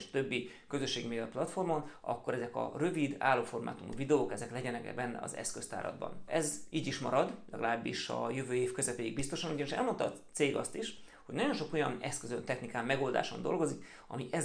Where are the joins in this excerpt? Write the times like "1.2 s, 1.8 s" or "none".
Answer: 6.3 s